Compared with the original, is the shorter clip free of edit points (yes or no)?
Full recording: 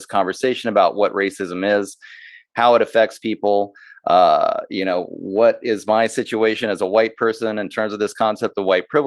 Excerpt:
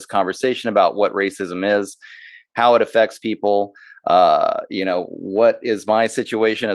yes